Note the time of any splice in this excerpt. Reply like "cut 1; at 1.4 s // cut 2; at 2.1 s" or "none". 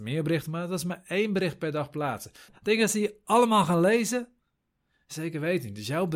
cut 1; at 2.5 s